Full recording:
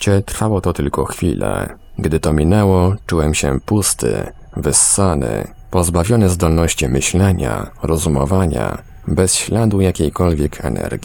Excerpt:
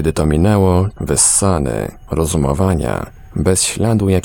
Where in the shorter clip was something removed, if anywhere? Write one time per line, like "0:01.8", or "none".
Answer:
0:01.0
0:02.1